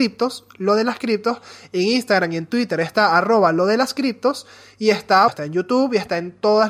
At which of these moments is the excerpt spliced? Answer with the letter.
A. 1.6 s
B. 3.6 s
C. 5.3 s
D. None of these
C